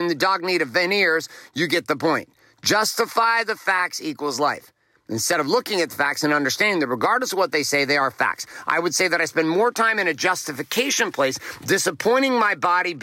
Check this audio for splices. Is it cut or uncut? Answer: uncut